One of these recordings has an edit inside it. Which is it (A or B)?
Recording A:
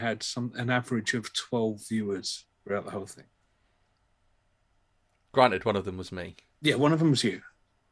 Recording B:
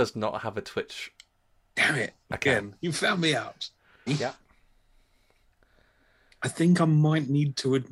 B